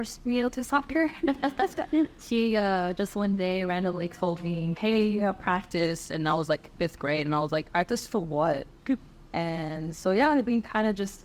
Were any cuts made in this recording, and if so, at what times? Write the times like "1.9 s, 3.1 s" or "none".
none